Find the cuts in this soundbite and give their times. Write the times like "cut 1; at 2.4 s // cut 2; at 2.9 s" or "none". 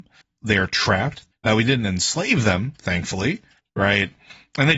cut 1; at 1.3 s // cut 2; at 3.7 s